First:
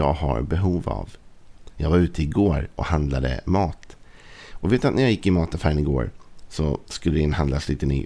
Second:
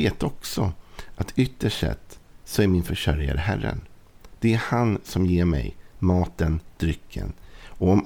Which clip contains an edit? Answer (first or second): second